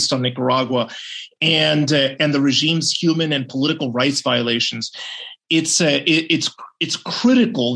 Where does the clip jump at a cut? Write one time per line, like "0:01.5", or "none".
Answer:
0:05.4